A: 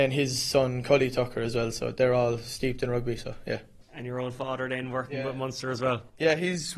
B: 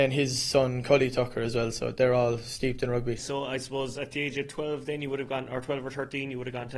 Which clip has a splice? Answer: B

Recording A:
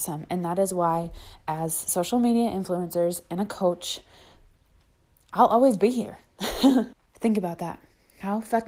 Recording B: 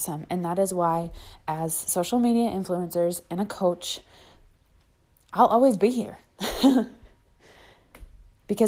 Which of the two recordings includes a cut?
A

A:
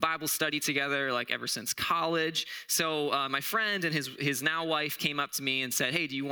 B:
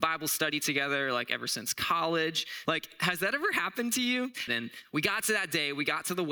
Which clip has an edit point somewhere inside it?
B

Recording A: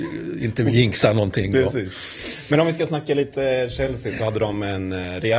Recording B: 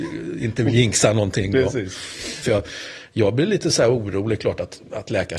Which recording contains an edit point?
B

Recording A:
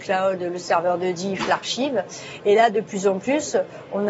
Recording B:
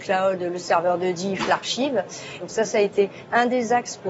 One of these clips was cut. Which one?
B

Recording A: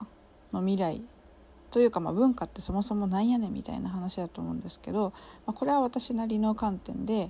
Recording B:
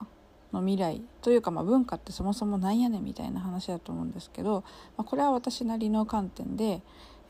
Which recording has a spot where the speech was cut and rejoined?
B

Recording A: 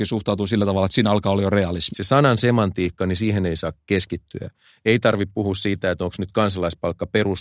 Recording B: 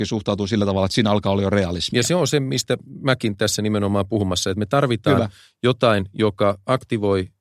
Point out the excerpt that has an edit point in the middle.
A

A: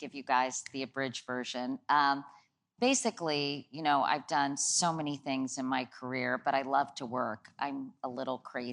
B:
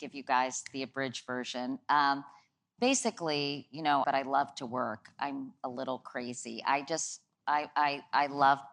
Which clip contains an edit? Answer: B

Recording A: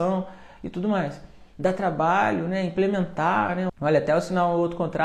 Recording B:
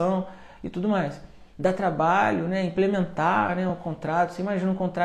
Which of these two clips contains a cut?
A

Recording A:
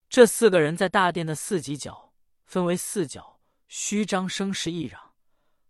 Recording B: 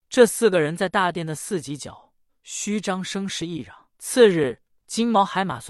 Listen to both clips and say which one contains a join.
B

